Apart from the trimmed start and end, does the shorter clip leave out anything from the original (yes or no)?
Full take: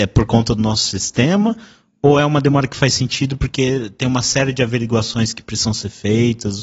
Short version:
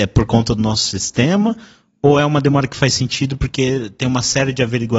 no